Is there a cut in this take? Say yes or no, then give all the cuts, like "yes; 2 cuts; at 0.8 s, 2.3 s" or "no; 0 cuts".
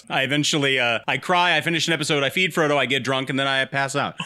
no; 0 cuts